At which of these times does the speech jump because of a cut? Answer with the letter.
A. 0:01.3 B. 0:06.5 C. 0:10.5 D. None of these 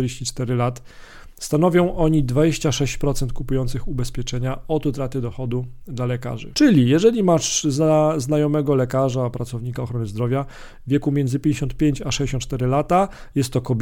B